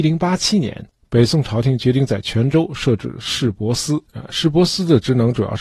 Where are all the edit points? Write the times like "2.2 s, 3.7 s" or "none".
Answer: 4.0 s

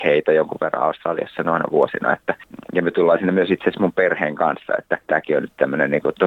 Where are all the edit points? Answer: none

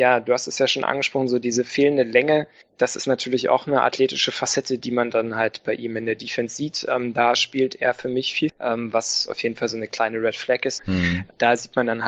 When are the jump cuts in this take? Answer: 8.5 s, 10.8 s

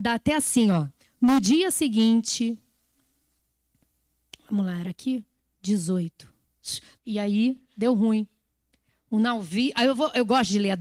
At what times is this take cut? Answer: 7.0 s

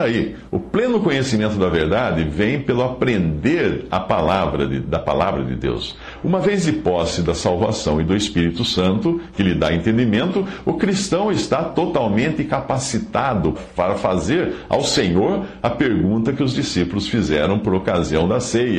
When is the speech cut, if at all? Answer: 13.5 s

